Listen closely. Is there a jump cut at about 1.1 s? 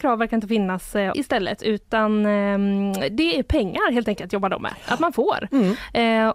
yes; 1 cut; at 1.1 s

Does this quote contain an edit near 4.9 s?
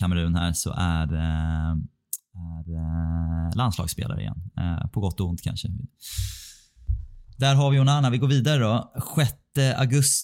no; 0 cuts

